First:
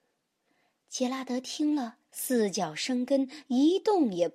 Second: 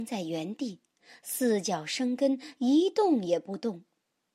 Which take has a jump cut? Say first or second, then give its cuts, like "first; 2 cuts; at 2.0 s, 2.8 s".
first; 1 cut; at 2.1 s